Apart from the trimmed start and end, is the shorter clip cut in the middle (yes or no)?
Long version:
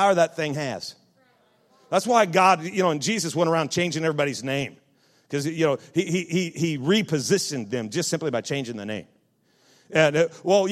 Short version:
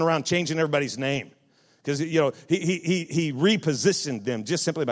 no